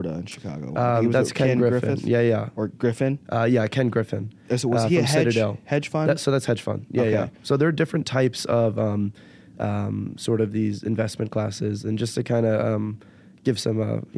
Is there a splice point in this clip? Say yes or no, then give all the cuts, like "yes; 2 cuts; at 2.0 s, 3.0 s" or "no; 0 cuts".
no; 0 cuts